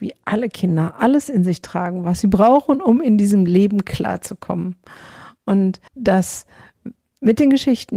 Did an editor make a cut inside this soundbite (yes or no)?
yes